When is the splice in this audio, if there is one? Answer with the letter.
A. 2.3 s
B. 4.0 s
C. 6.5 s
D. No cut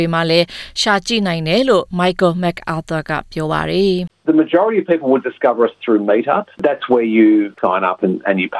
C